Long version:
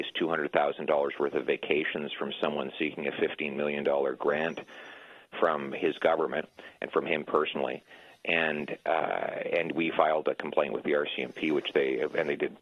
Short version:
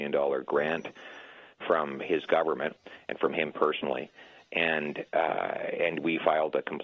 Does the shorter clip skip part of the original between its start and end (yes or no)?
no